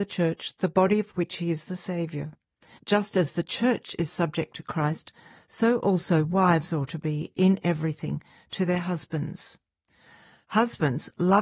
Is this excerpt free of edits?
yes; 0 cuts

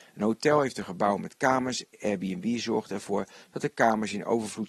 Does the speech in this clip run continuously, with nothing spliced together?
yes; 0 cuts

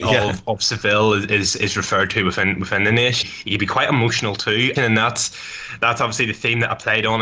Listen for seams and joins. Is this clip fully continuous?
no; 2 cuts; at 3.2 s, 4.8 s

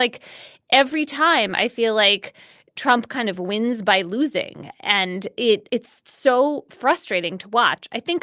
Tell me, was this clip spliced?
no; 0 cuts

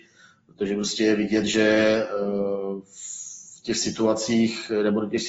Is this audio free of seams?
yes; 0 cuts

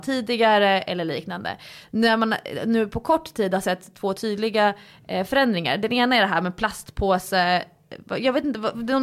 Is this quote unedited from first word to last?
yes; 0 cuts

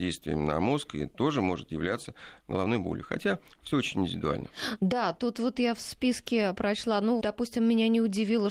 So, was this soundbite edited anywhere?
yes; 1 cut; at 7.2 s

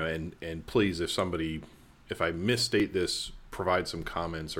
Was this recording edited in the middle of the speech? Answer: no; 0 cuts

